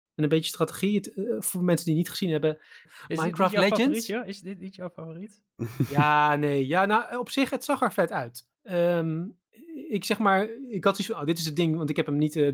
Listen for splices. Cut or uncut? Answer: cut